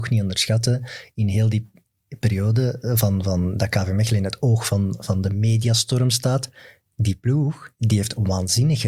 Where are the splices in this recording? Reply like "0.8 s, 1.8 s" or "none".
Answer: none